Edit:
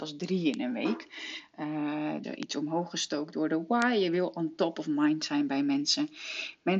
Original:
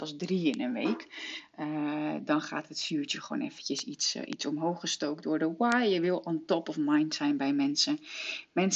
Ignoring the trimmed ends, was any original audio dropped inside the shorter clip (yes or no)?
yes